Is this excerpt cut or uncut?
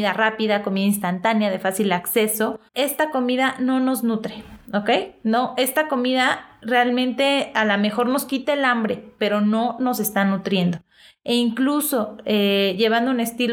cut